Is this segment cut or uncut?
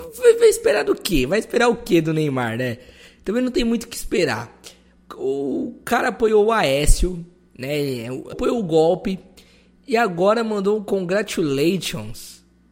cut